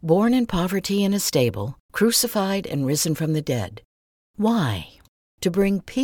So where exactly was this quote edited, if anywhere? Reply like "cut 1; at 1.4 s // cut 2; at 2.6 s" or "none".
none